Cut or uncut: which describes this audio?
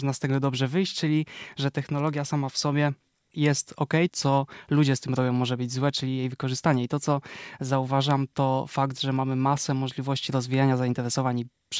cut